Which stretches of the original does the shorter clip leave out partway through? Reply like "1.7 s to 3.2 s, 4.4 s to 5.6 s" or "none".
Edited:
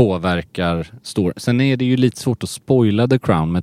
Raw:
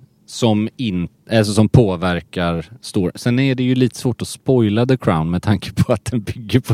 none